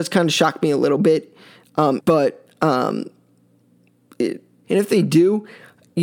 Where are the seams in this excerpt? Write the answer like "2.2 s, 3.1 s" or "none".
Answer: 2.0 s, 4.6 s